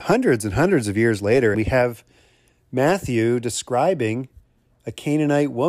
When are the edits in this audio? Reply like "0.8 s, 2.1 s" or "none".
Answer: 1.5 s